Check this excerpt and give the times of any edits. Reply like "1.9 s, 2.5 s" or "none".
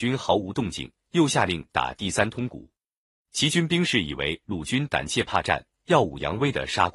none